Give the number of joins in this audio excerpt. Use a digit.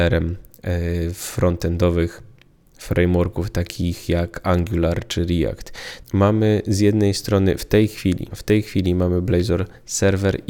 2